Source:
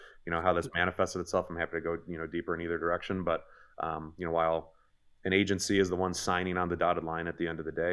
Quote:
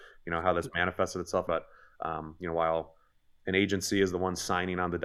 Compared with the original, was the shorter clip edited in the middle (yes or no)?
yes